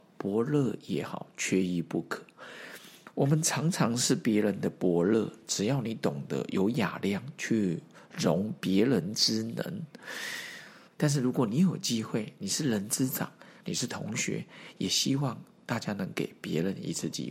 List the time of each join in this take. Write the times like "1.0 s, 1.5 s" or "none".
10.9 s, 13.6 s

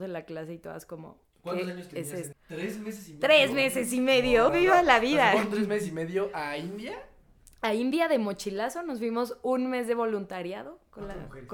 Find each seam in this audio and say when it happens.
2.3 s, 4.5 s

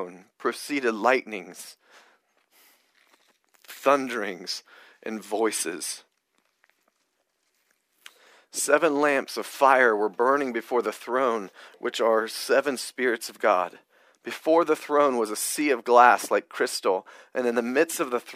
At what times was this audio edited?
none

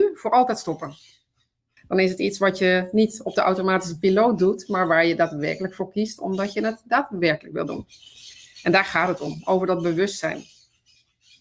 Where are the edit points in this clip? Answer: 1.8 s

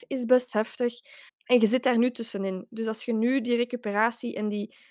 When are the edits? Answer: 1.3 s

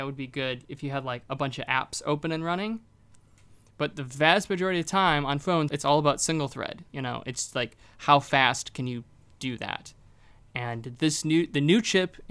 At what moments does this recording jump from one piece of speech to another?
5.7 s, 6.9 s

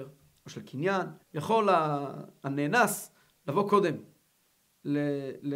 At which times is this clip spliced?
1.2 s

